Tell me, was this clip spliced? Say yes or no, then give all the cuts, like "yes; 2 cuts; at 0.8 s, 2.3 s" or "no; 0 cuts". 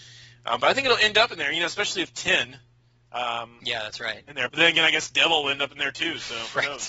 no; 0 cuts